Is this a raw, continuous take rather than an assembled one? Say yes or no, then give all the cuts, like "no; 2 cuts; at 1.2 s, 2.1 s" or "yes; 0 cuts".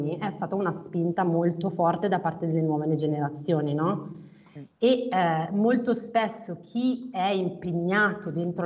yes; 0 cuts